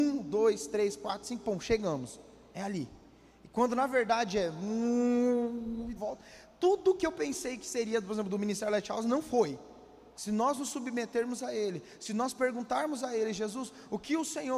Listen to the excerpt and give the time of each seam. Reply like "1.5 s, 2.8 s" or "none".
6.0 s, 10.1 s